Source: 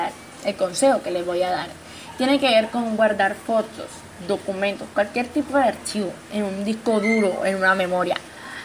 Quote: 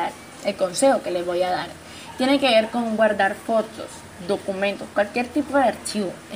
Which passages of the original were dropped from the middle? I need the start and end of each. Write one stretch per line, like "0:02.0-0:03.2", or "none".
none